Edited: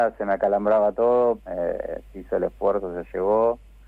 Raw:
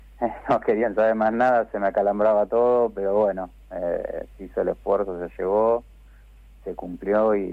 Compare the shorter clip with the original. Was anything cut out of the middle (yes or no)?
yes